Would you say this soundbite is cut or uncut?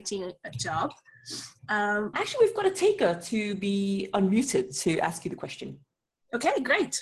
cut